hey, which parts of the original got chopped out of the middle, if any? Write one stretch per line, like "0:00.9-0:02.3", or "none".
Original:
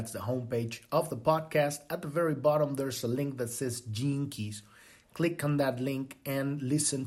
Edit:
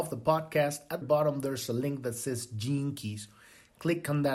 0:02.0-0:02.4